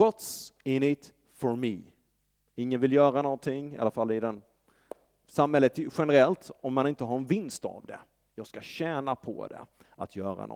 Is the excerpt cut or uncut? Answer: uncut